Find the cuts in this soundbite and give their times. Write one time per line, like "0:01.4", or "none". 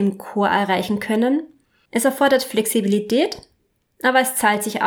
0:01.9